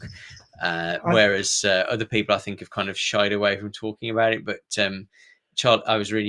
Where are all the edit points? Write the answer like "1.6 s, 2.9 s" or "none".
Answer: none